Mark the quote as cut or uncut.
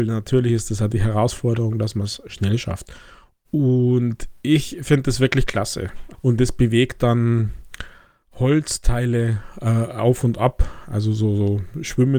cut